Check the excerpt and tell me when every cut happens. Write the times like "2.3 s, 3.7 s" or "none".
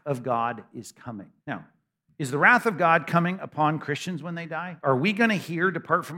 1.4 s